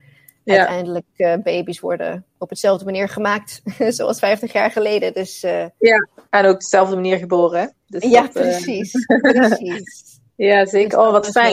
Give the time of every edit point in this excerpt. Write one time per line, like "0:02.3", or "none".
none